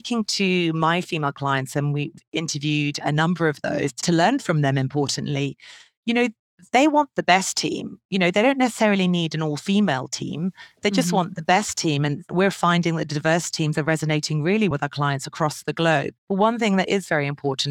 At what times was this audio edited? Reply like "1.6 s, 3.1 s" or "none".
14.7 s, 16.2 s